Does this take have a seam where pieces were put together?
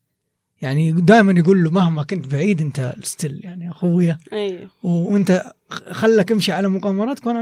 no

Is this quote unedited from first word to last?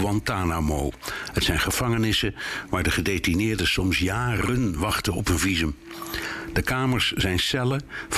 yes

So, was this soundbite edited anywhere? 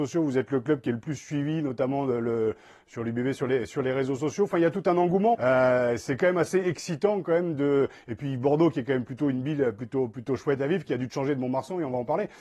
yes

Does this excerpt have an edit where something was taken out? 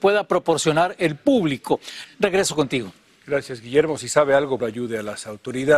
yes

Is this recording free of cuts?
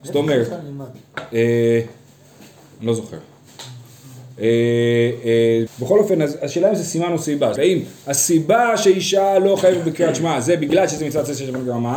no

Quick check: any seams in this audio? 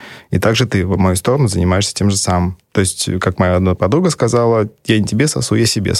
no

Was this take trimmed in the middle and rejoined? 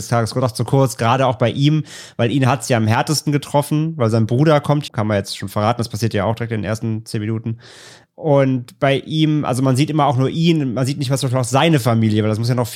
yes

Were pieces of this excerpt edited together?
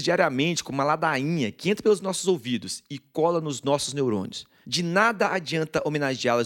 yes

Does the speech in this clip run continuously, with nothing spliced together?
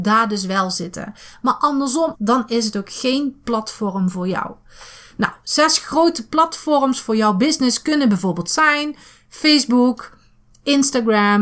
no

